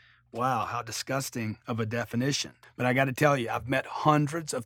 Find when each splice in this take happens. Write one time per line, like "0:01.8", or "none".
0:02.6

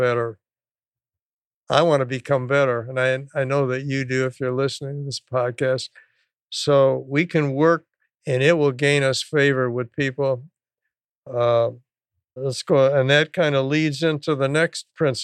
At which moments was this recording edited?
0:08.0
0:12.4

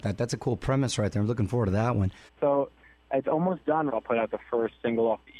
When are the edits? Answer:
0:02.3
0:03.9

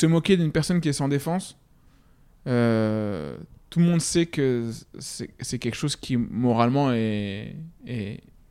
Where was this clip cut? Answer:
none

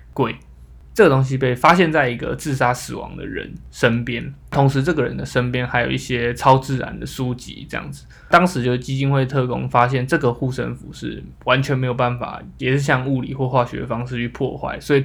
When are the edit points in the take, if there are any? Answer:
none

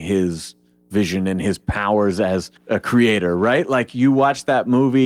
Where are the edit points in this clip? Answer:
0:02.6

